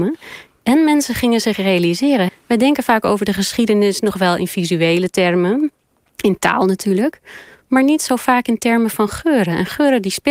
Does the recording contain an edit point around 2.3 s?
yes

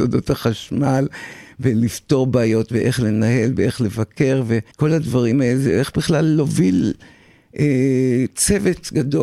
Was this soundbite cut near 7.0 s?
no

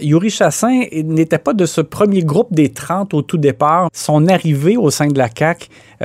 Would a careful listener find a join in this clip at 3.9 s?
yes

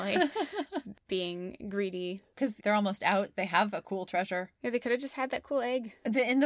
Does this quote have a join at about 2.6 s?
yes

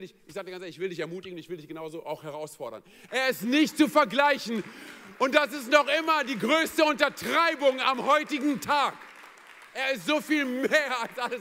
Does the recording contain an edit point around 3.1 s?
yes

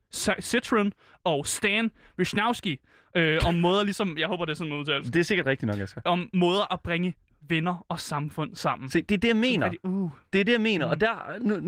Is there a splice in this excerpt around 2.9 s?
no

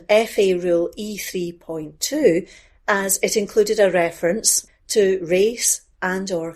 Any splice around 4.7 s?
yes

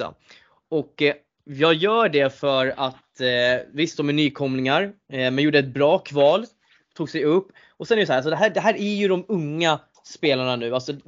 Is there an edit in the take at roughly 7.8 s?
no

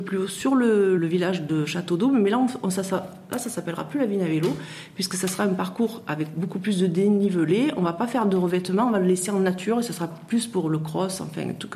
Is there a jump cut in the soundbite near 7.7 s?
no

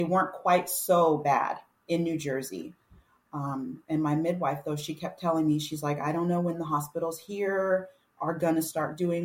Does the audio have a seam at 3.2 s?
no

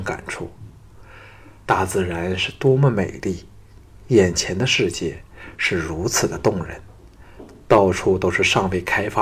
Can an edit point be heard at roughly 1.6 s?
yes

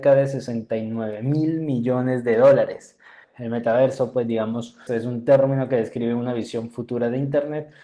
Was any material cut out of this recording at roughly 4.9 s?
yes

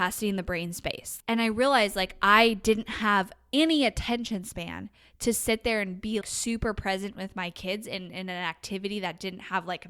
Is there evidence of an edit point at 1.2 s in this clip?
yes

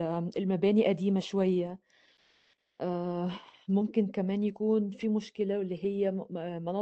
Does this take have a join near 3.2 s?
no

